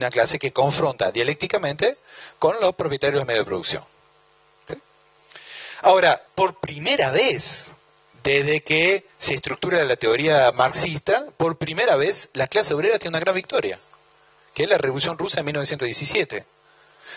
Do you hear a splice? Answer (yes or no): yes